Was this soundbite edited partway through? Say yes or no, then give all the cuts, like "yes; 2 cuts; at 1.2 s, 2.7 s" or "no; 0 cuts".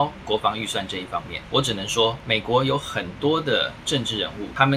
no; 0 cuts